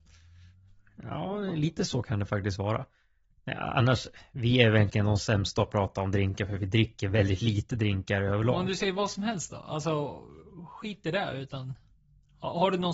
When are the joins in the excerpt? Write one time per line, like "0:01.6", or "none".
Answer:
none